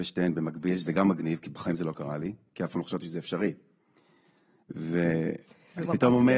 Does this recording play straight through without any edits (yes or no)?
yes